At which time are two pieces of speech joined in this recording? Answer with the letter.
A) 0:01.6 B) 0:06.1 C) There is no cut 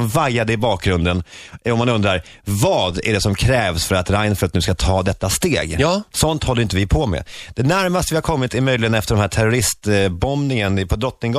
B